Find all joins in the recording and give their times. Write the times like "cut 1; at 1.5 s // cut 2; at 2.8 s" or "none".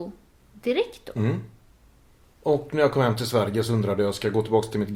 cut 1; at 2.2 s